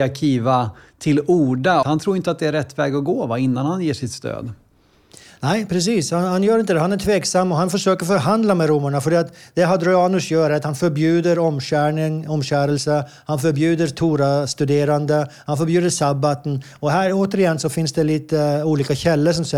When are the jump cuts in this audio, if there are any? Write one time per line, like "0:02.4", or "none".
0:01.8